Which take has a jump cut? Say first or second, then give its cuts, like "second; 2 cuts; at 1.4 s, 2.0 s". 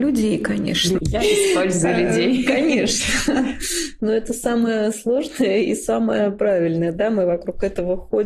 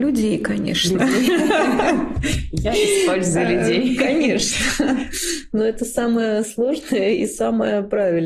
first; 1 cut; at 1.0 s